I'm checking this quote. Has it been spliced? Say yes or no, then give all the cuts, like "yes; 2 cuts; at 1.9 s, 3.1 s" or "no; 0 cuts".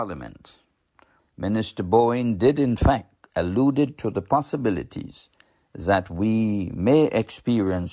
yes; 1 cut; at 1.2 s